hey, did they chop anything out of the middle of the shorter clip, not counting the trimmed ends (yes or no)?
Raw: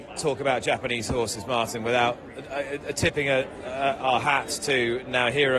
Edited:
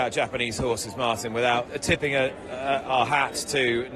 yes